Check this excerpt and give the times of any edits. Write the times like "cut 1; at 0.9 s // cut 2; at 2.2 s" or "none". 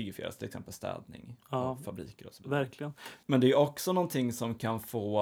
cut 1; at 3.2 s